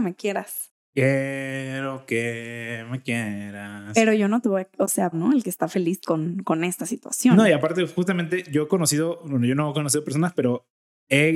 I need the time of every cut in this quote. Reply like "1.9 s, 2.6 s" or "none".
5.1 s